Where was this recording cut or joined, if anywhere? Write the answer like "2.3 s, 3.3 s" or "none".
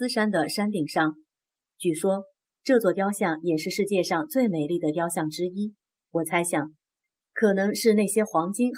1.6 s, 6.0 s